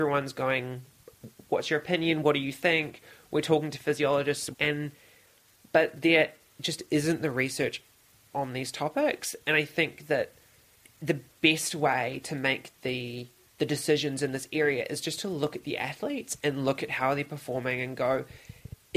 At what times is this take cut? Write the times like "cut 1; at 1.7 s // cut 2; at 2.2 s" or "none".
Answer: cut 1; at 4.5 s